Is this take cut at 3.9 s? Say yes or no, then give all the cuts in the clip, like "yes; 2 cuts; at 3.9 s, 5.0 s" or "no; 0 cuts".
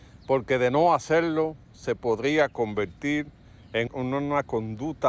yes; 1 cut; at 3.9 s